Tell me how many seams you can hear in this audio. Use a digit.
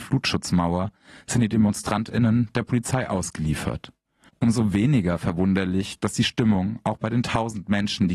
1